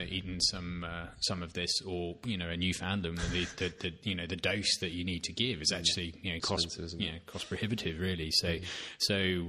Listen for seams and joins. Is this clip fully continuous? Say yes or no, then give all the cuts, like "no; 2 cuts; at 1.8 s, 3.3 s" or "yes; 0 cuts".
no; 1 cut; at 6.4 s